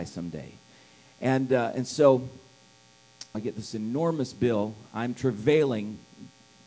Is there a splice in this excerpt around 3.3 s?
yes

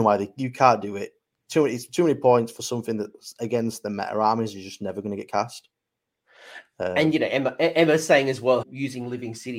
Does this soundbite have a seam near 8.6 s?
yes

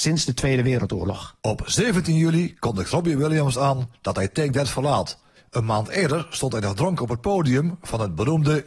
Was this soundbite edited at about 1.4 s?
yes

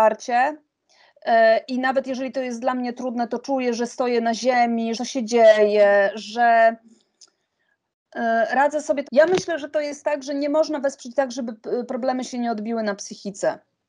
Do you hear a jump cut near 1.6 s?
no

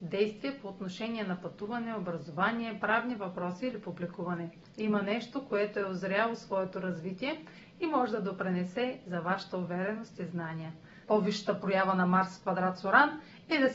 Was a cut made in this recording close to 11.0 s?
yes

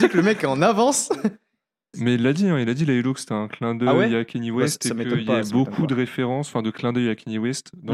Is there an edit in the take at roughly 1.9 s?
yes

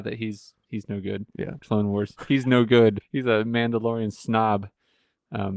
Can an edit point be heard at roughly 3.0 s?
yes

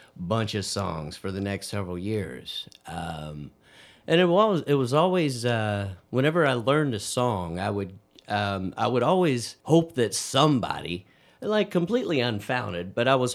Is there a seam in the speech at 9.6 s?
yes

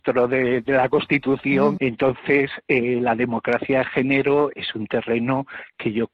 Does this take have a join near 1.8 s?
yes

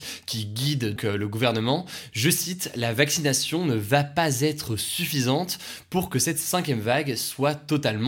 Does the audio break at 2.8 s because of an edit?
no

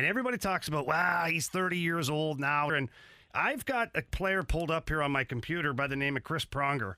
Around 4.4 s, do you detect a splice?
no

